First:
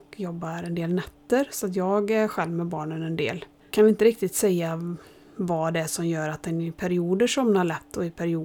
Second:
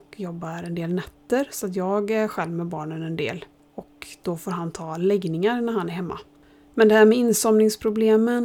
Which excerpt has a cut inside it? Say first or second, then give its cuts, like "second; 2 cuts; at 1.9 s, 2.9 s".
first; 1 cut; at 3.6 s